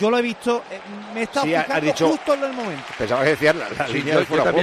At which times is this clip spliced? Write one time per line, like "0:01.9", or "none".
0:02.9